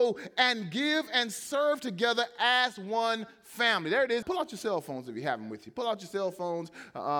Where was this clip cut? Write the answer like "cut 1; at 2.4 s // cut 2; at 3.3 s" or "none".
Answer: cut 1; at 4.2 s